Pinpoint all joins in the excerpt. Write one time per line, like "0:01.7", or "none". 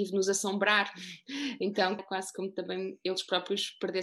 0:02.0